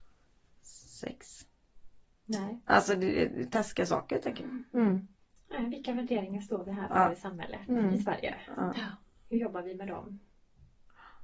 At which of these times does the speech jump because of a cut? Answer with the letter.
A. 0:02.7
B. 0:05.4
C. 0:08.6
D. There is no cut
D